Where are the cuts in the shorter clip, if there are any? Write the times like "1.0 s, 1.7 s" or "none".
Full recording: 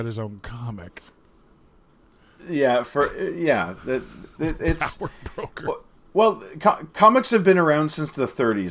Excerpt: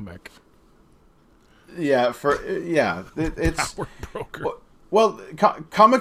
3.1 s